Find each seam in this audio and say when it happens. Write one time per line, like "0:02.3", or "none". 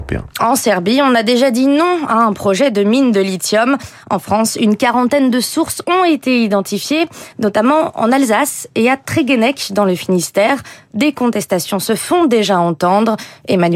none